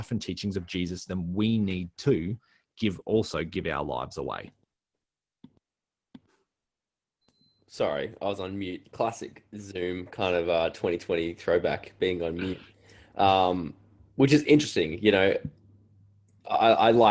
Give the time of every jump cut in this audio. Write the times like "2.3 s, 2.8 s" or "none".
none

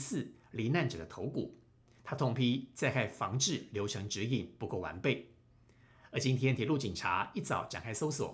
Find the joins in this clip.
none

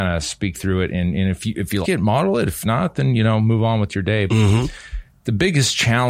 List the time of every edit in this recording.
1.8 s, 4.3 s

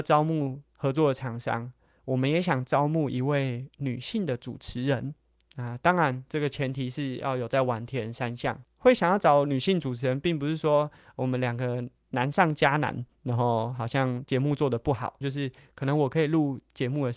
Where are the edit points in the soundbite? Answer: 8.6 s, 15.2 s

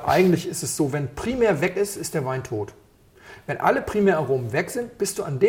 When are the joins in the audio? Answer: none

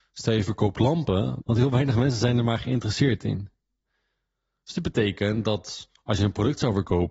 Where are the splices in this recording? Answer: 1.4 s

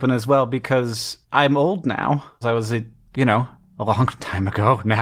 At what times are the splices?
1.2 s, 2.4 s

